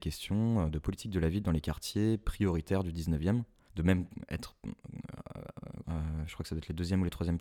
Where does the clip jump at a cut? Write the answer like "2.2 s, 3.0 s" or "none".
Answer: 3.7 s, 5.8 s